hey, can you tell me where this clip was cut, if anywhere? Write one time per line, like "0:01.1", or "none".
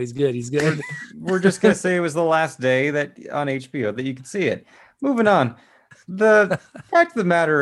none